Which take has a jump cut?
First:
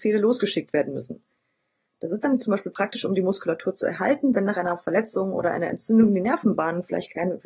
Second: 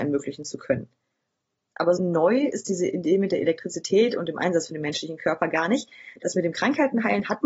second; 1 cut; at 2.0 s

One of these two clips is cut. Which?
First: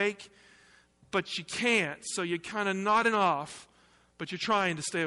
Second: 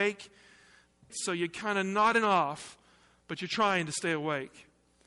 second; 1 cut; at 1.1 s

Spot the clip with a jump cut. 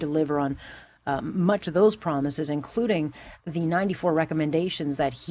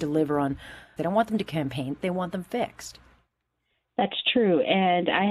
second; 1 cut; at 1.0 s

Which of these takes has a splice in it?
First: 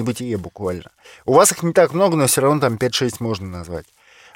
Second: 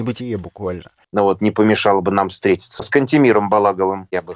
second; 2 cuts; at 1.0 s, 2.8 s

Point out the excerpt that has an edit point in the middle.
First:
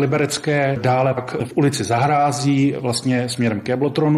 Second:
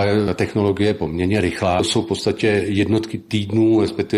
first; 1 cut; at 1.2 s

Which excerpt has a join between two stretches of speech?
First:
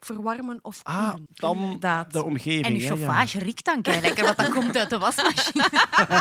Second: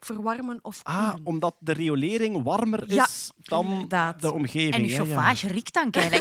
first; 1 cut; at 1.3 s

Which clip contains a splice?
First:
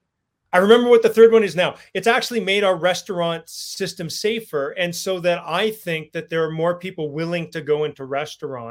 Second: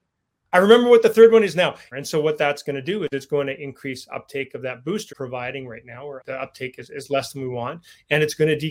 second; 3 cuts; at 1.9 s, 5.1 s, 6.2 s

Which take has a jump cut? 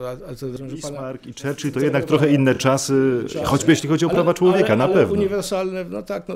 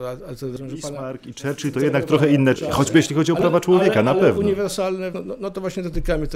second; 2 cuts; at 2.5 s, 5.1 s

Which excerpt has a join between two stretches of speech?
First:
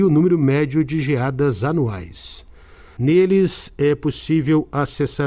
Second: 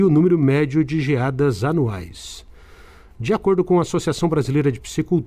first; 1 cut; at 3.0 s

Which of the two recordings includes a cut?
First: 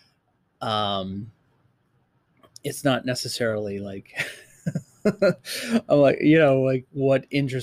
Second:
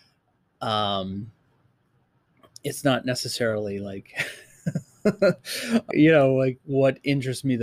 second; 1 cut; at 5.9 s

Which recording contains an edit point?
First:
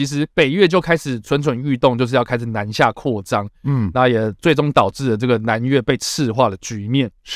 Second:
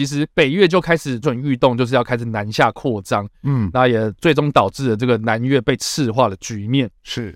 second; 1 cut; at 1.2 s

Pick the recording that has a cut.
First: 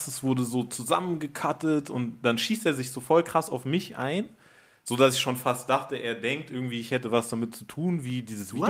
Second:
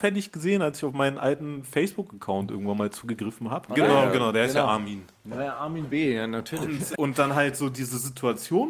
second; 2 cuts; at 3.7 s, 6.9 s

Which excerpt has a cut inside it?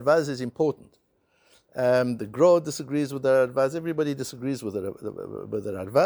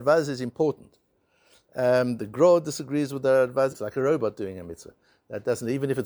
second; 1 cut; at 3.7 s

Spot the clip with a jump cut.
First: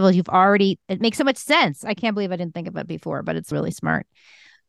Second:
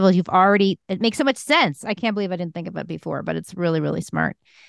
first; 1 cut; at 3.5 s

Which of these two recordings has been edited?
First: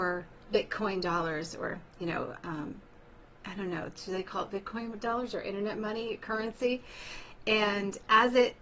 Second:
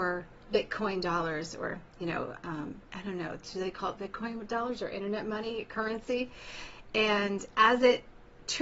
second; 1 cut; at 2.8 s

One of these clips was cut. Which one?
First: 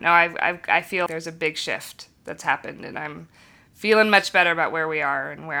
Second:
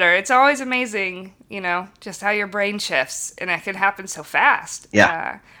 first; 1 cut; at 1.1 s

